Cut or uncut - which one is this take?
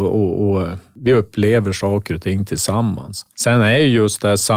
uncut